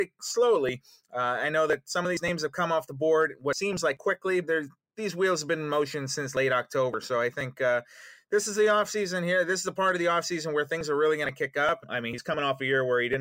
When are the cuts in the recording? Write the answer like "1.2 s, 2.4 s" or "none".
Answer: 4.4 s, 11.8 s